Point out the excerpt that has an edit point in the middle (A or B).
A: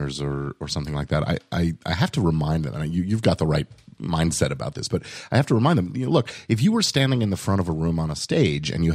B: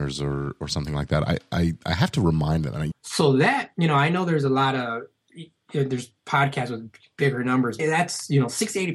B